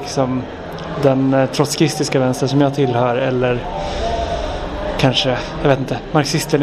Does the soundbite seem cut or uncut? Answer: uncut